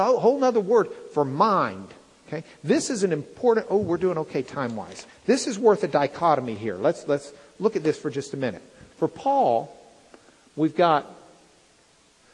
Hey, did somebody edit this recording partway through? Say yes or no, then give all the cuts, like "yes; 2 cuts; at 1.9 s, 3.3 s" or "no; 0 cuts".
no; 0 cuts